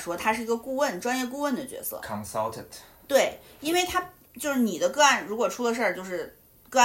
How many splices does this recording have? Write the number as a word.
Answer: zero